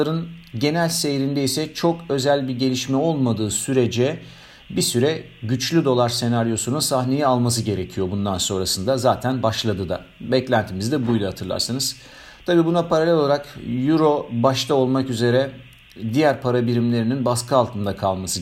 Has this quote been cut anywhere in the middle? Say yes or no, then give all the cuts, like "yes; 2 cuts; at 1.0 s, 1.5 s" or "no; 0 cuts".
no; 0 cuts